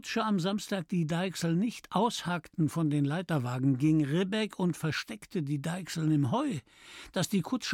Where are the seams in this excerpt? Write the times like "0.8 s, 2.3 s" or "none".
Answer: none

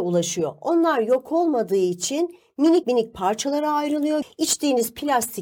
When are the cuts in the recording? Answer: 2.8 s, 4.2 s

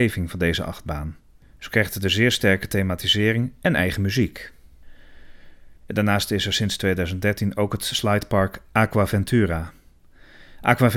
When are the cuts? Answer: 5.8 s

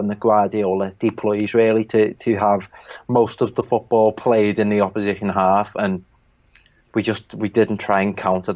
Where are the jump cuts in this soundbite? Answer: none

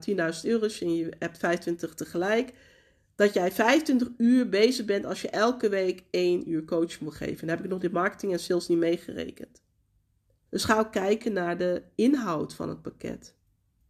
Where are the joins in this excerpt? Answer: 10.5 s

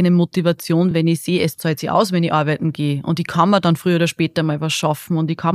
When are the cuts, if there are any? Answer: none

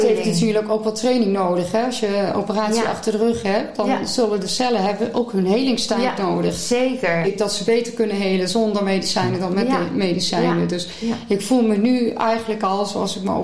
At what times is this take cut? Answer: 7.2 s

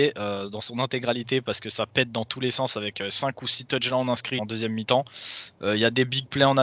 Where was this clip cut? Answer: 4.4 s

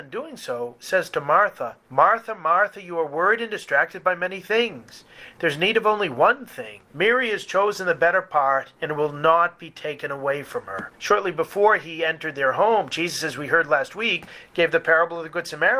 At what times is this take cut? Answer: 10.9 s

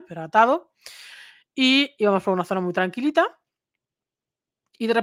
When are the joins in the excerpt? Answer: none

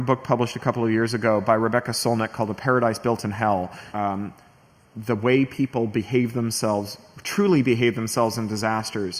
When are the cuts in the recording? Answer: 3.9 s

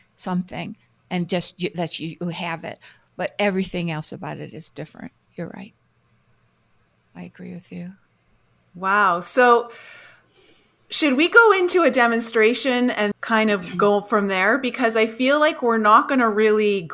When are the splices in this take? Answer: 13.1 s

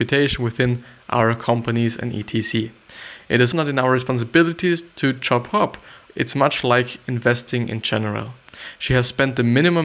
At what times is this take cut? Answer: 3.5 s, 6.1 s, 8.7 s

